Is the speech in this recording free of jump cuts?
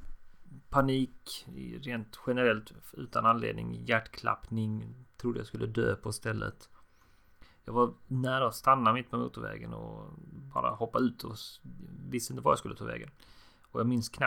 yes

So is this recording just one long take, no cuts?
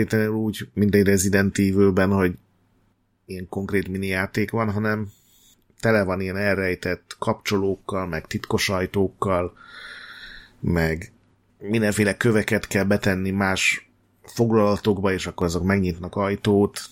yes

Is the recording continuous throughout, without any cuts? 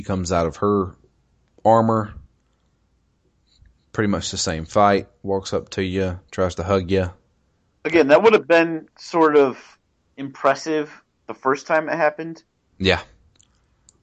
no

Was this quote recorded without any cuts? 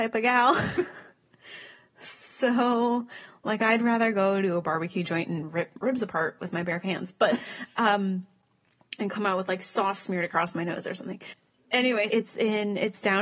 no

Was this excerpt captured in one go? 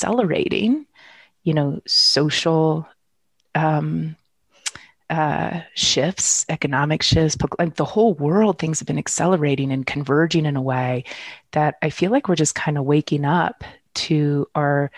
yes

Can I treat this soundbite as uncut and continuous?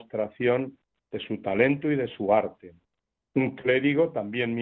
no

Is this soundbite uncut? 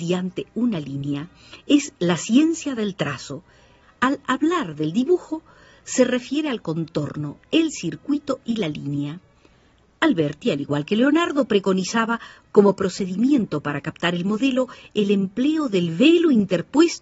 no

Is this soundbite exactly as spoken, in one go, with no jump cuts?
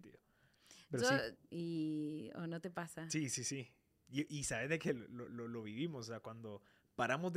no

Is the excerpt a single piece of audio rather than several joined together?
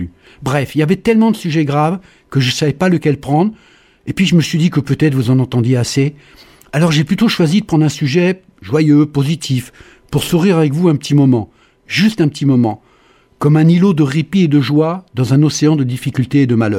yes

